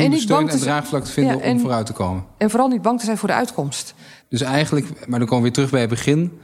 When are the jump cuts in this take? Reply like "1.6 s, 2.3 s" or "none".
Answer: 4.2 s